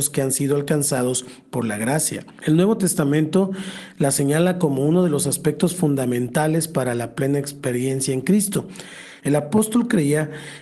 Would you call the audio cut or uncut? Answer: cut